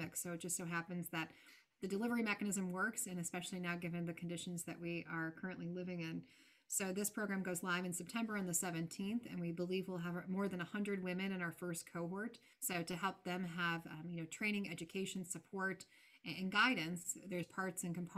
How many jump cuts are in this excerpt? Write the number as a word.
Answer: one